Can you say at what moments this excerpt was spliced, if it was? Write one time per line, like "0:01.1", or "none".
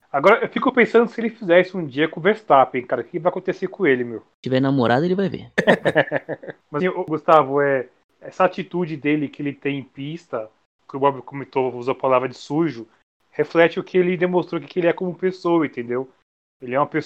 0:06.8